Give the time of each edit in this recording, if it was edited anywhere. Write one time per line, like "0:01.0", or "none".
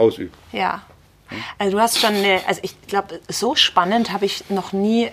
0:01.6